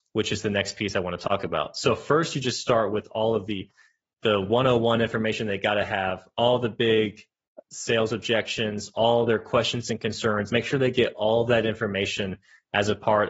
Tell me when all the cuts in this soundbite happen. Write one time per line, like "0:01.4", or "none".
none